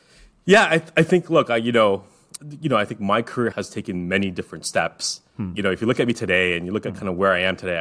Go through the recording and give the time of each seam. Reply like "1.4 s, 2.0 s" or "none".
3.5 s

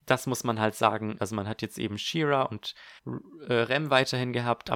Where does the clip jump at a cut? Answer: 1.2 s, 3.0 s

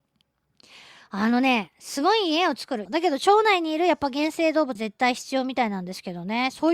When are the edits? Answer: 2.9 s, 4.8 s

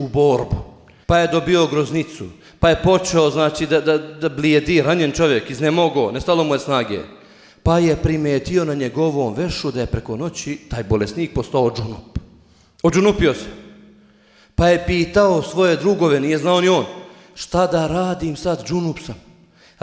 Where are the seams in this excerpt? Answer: 1.0 s

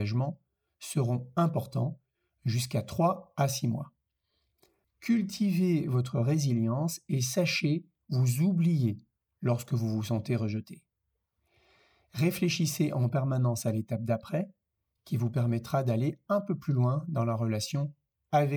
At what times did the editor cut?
4.8 s

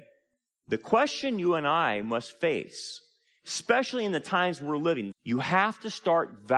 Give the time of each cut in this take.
5.1 s

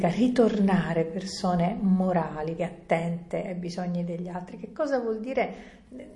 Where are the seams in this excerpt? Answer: 2.6 s

